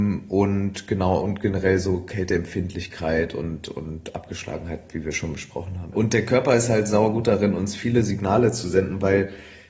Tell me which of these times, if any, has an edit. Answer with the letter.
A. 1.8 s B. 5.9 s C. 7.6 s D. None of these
B